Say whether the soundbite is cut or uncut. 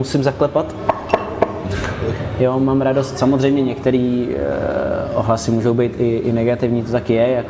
uncut